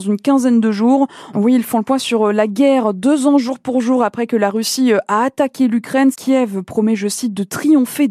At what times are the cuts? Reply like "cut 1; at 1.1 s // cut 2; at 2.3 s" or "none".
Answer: cut 1; at 1.3 s // cut 2; at 6.1 s